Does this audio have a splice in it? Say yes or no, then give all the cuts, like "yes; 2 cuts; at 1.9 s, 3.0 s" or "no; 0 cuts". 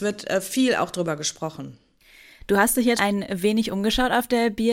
yes; 1 cut; at 3.0 s